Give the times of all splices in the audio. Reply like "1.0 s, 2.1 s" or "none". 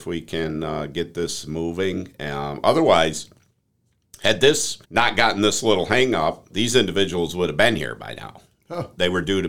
4.8 s, 6.5 s